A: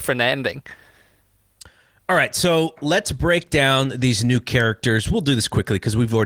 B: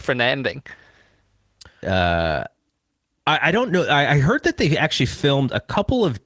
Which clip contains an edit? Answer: B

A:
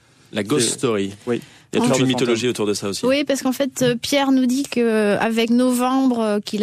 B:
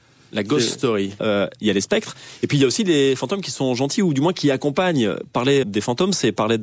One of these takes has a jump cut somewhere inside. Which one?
B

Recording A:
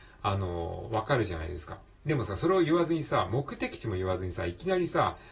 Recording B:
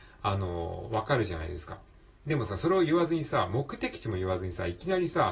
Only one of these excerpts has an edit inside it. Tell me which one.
A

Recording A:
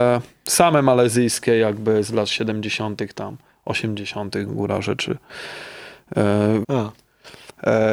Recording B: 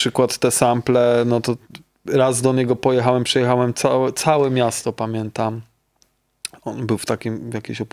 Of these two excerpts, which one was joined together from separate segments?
A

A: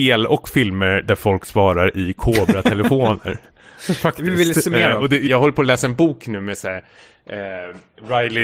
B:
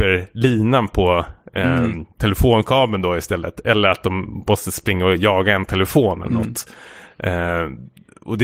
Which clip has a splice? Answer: A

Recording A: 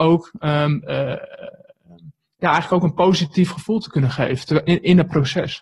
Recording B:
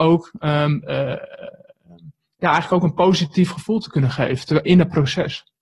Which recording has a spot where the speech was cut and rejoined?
B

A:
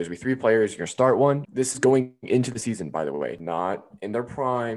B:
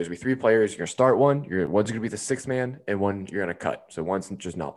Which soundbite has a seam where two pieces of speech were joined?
A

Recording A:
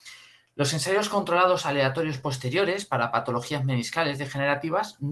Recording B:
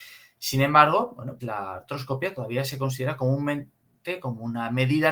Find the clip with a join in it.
B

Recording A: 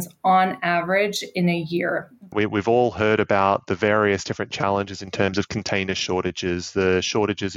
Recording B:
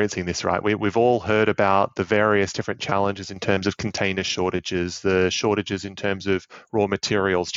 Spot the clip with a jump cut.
A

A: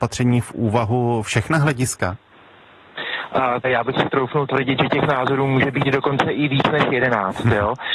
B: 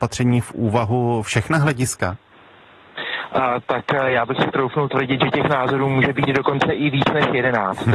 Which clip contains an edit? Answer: A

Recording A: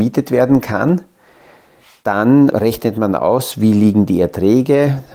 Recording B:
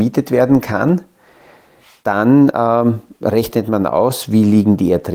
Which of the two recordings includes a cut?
A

